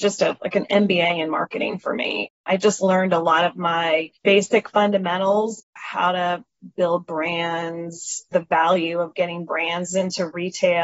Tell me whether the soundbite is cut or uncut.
cut